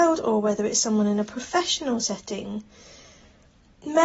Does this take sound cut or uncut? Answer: uncut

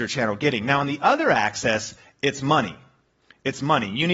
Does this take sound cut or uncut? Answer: uncut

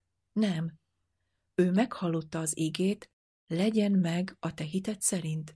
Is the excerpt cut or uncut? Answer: uncut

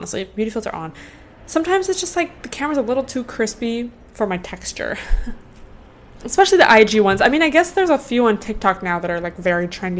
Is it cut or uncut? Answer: uncut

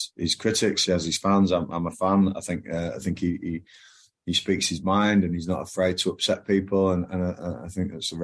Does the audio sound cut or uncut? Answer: uncut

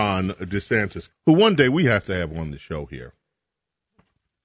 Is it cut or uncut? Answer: cut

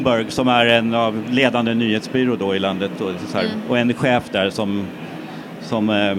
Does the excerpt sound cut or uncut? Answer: uncut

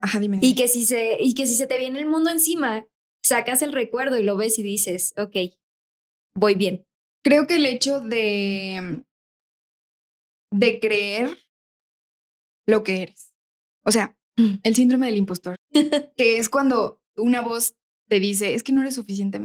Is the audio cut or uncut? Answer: cut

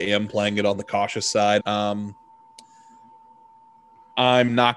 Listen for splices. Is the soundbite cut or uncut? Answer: cut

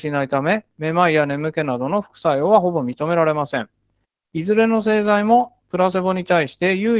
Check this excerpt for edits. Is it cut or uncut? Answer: cut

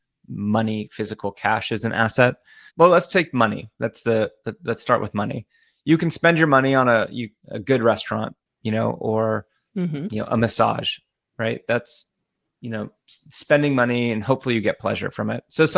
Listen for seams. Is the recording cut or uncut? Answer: cut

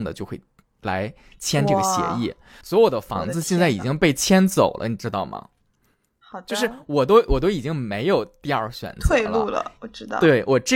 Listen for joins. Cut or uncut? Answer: uncut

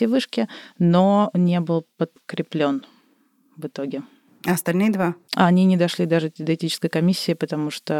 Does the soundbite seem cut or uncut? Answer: uncut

